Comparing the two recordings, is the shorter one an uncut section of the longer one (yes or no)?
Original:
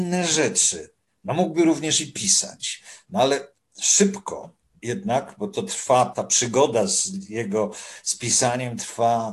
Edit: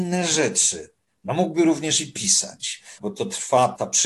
no